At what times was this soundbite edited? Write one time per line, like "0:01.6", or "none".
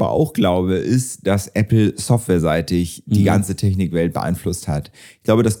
none

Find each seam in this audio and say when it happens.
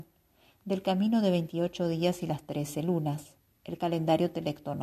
none

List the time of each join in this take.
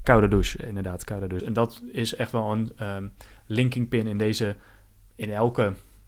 0:01.4

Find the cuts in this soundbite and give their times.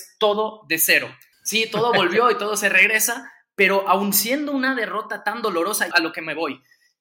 0:01.3
0:05.9

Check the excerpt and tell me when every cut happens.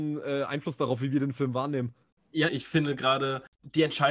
0:02.5

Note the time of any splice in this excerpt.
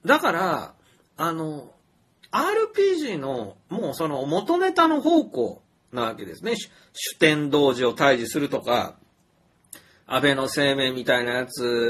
none

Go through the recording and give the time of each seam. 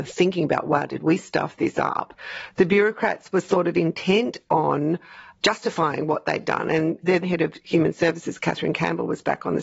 0:07.2

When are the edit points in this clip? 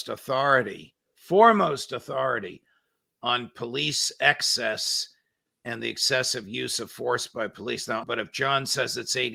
0:08.0

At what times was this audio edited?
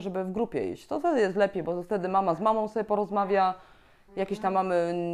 none

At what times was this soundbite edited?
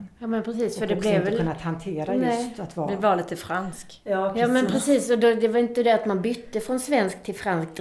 none

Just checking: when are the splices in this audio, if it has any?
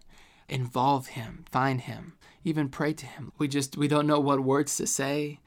0:01.5
0:03.3

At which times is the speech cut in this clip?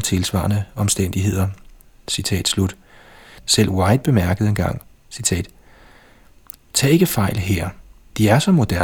0:03.4

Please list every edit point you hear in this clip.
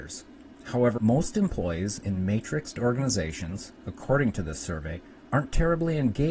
0:01.0

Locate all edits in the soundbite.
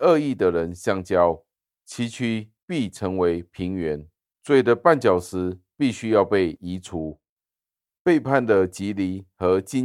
0:01.7

